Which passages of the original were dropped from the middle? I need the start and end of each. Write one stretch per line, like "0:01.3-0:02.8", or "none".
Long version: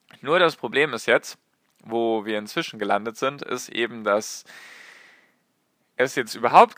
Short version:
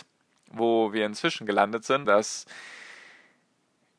0:03.4-0:04.0